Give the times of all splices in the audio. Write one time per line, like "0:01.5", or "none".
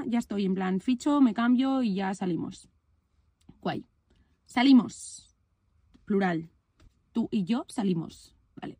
none